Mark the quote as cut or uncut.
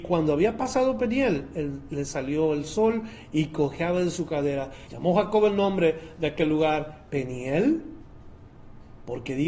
cut